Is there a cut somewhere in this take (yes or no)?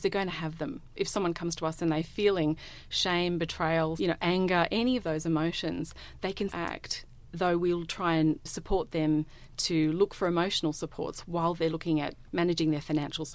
yes